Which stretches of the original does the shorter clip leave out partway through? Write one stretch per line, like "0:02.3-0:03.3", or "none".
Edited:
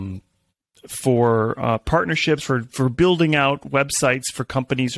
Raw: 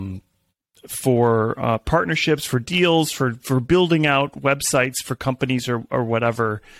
0:02.4-0:03.1

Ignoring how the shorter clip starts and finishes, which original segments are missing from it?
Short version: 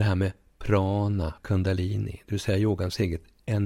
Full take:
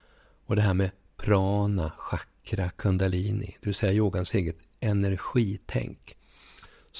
0:02.0-0:02.7

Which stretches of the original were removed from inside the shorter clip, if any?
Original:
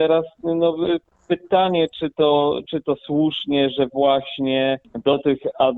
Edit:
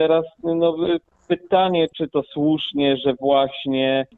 0:01.9-0:02.6

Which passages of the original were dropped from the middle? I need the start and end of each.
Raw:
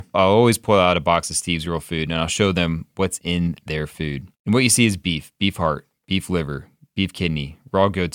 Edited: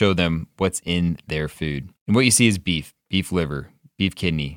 0:05.4-0:05.9

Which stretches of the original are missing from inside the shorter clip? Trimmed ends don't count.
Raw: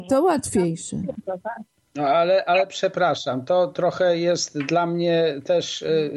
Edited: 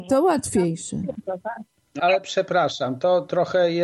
0:02.0-0:02.4

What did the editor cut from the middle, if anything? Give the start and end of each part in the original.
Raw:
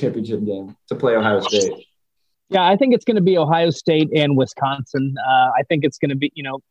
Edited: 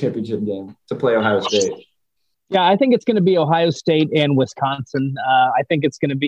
none

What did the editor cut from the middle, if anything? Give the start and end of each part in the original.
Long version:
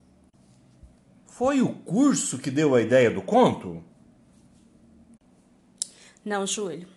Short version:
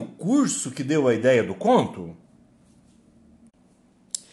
none

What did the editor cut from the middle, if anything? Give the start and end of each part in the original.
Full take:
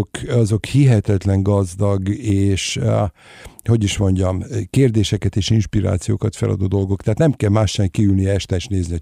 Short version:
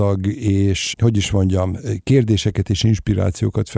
0:02.7-0:03.6

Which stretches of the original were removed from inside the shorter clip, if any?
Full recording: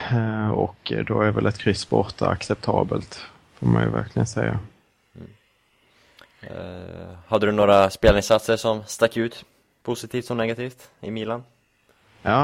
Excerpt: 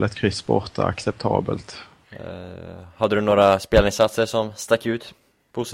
0:03.5-0:06.3

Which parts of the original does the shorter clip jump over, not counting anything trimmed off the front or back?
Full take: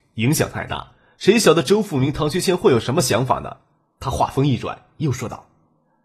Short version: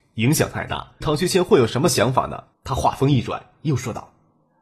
0:01.0-0:02.1
0:03.7-0:03.9

